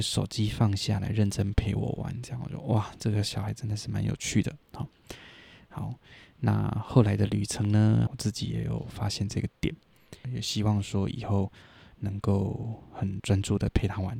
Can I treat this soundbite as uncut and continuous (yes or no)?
no